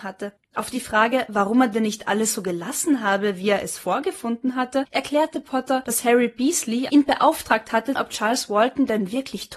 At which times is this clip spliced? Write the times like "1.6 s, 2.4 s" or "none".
6.9 s, 8.0 s

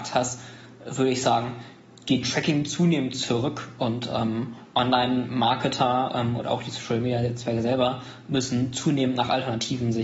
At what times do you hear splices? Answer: none

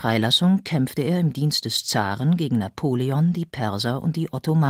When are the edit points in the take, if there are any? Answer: none

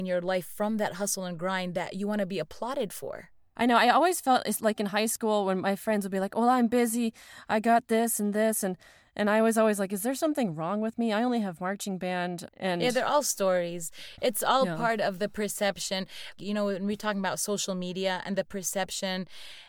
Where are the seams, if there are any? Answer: 12.5 s, 16.4 s

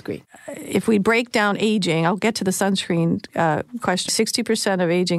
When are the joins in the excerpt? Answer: 4.1 s

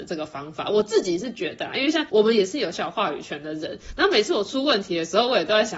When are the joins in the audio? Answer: 2.7 s

